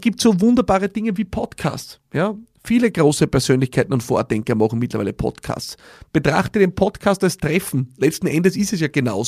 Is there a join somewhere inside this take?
no; 0 cuts

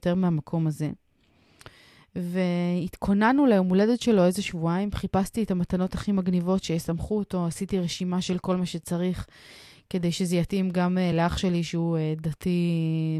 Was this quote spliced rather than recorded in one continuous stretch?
no; 0 cuts

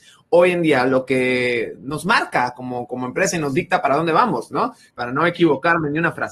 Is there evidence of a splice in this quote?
yes; 1 cut; at 4.9 s

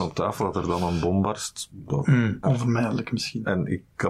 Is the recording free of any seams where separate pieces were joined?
no; 1 cut; at 2.4 s

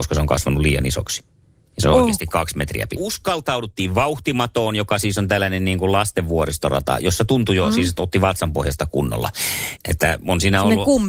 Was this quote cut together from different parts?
yes; 2 cuts; at 3.0 s, 9.8 s

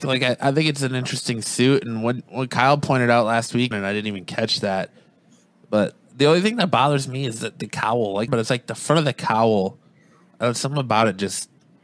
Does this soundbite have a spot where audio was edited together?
yes; 2 cuts; at 3.7 s, 8.3 s

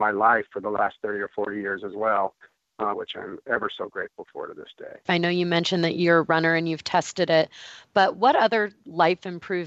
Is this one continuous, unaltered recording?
no; 2 cuts; at 2.9 s, 5.1 s

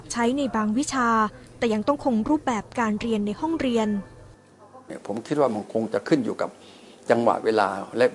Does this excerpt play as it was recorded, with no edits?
yes; 0 cuts

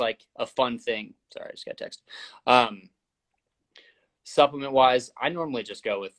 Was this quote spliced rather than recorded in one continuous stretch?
no; 0 cuts

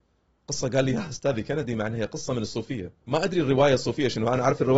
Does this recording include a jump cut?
yes; 1 cut; at 3.0 s

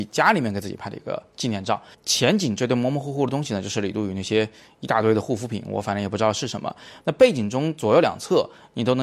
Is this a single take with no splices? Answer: no; 1 cut; at 1.9 s

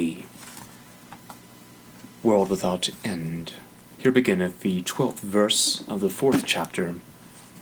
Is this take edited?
yes; 1 cut; at 3.9 s

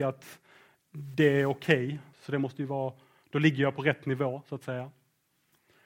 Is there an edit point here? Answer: yes; 1 cut; at 2.1 s

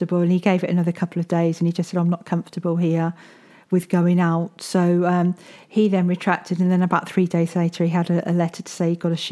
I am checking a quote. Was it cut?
no; 0 cuts

